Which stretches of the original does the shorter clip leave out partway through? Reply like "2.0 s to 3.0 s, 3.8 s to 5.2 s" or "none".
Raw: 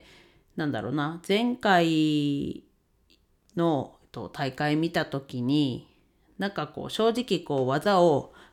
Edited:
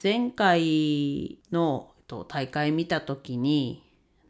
2.7 s to 3.5 s